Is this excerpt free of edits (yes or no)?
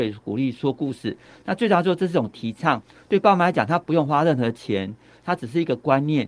yes